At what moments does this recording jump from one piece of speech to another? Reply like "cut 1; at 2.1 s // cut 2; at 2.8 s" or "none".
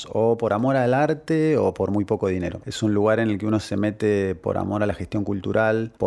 cut 1; at 2.6 s